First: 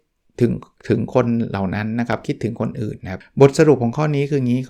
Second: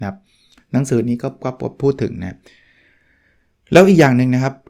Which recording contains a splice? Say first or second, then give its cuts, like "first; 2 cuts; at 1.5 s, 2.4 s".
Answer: first; 1 cut; at 3.2 s